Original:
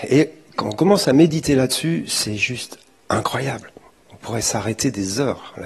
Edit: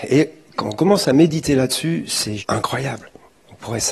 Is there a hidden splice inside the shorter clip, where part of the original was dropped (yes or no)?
yes